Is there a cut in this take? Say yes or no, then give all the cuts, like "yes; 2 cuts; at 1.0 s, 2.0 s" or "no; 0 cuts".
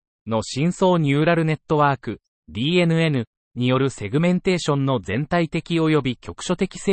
no; 0 cuts